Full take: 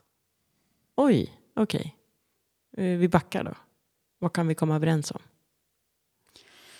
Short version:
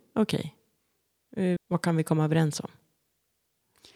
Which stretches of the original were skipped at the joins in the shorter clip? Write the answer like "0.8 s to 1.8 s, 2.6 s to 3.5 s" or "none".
3.0 s to 4.1 s